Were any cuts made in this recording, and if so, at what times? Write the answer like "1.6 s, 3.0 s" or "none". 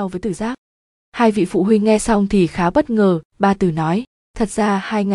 none